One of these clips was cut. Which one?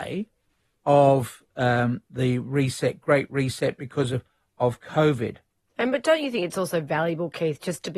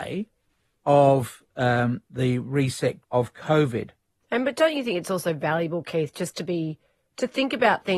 second; 1 cut; at 3.0 s

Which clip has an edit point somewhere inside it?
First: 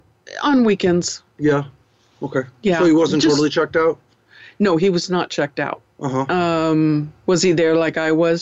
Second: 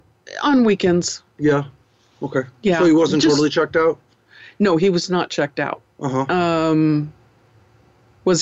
first; 1 cut; at 7.2 s

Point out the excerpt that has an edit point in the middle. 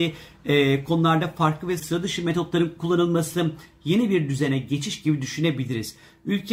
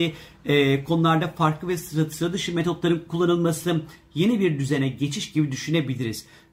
first; 1 cut; at 1.8 s

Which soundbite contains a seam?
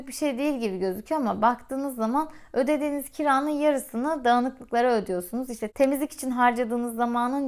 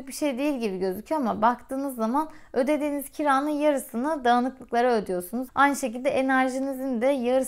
second; 1 cut; at 5.5 s

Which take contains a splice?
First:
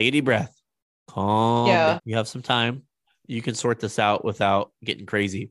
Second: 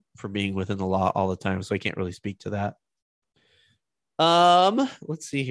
first; 1 cut; at 2.0 s

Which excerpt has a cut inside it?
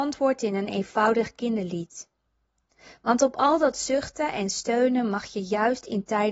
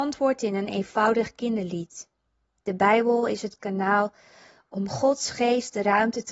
second; 1 cut; at 2.6 s

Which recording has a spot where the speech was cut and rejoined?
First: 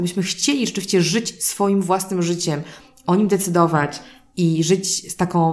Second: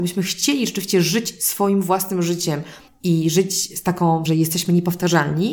second; 2 cuts; at 2.9 s, 4.3 s

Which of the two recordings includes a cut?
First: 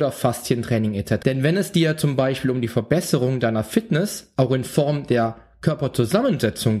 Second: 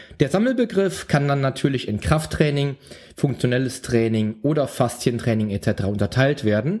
first; 1 cut; at 1.2 s

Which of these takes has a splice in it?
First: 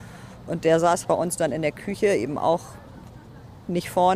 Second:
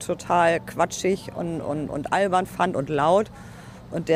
first; 1 cut; at 1.0 s

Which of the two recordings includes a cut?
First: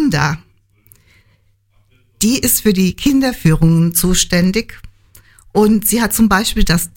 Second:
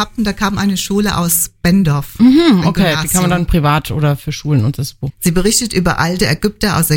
second; 1 cut; at 5.1 s

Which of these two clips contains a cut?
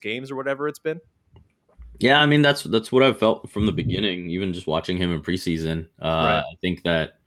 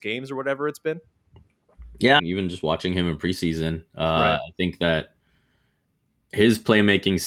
second; 1 cut; at 2.2 s

